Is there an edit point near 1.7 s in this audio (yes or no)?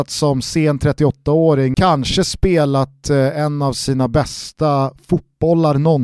yes